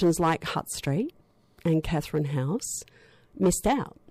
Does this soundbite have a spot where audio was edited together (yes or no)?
no